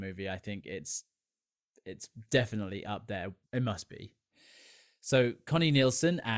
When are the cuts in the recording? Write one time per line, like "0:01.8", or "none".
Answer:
0:03.4

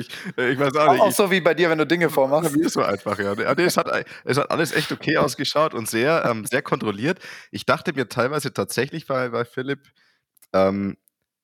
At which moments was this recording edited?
none

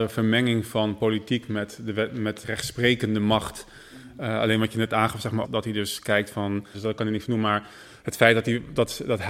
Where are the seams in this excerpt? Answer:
0:02.4
0:05.4
0:06.7

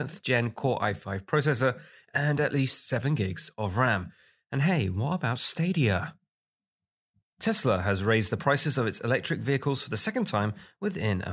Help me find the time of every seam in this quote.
none

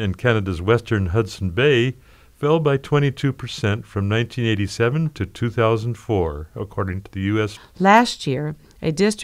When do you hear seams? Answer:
0:07.6

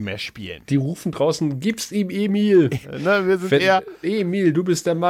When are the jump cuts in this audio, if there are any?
0:02.8
0:04.0

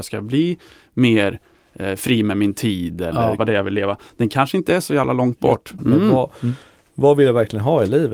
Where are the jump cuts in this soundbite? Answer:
0:03.4
0:05.8

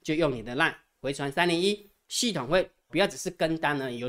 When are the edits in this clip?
0:02.9

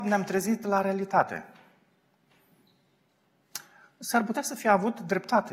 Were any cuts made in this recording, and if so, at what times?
none

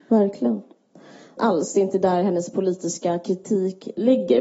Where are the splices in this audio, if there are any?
0:01.4

